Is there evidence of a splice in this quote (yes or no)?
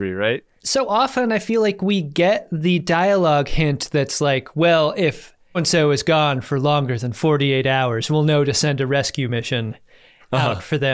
yes